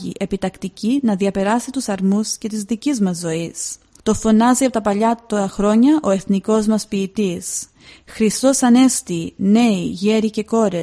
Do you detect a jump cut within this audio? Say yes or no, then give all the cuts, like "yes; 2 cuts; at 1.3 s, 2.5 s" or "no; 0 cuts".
yes; 1 cut; at 4.0 s